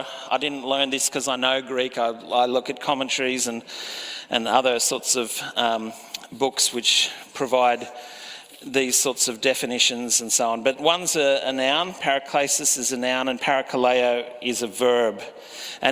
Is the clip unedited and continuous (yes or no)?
yes